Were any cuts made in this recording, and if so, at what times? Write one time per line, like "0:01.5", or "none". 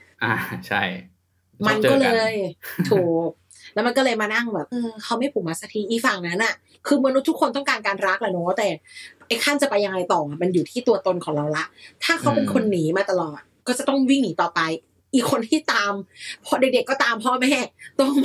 0:04.7